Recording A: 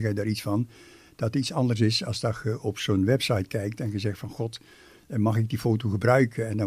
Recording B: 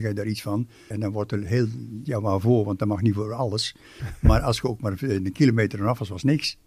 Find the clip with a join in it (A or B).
B